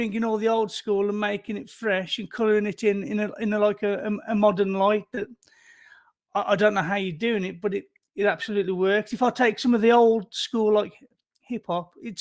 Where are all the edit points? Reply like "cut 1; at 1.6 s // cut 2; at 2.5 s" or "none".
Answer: none